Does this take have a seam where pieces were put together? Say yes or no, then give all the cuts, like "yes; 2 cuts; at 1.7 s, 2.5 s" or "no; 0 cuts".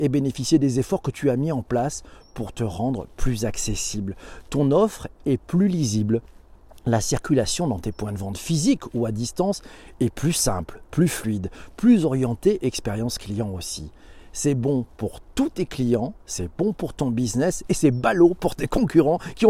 no; 0 cuts